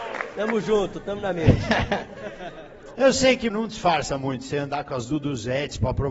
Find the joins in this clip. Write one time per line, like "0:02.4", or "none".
0:03.5

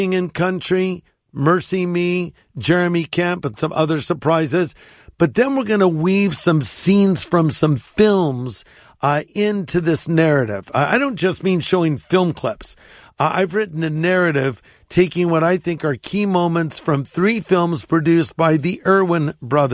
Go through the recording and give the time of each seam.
none

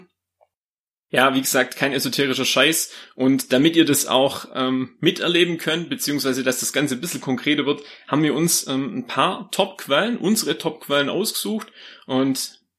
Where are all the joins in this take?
none

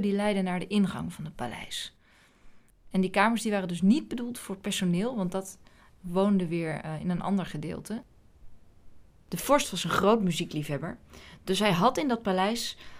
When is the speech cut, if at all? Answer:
0:02.9

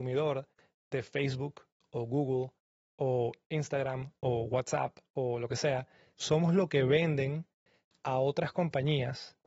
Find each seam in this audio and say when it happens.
0:06.2

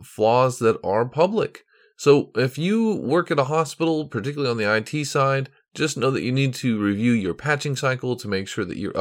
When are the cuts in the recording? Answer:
none

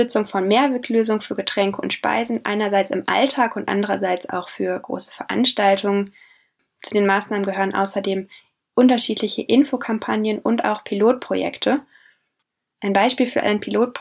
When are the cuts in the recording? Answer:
none

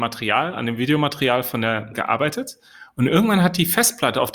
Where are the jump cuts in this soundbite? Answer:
0:01.9

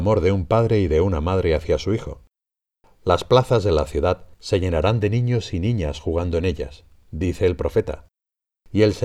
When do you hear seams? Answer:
0:02.8
0:04.3

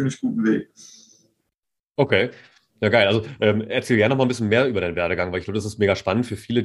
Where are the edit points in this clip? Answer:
none

